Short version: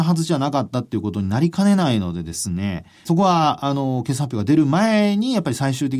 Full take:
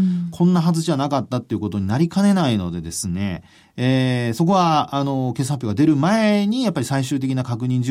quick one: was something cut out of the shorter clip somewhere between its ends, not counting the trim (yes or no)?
yes